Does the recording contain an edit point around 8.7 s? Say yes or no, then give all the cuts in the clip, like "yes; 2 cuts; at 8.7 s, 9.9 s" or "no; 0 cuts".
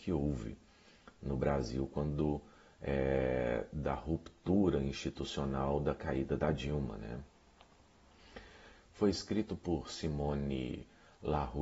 yes; 1 cut; at 8.7 s